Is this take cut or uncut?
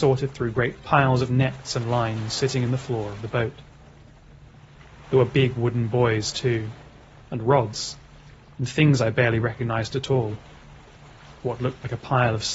uncut